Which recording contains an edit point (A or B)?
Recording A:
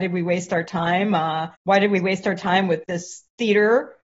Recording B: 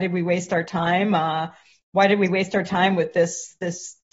A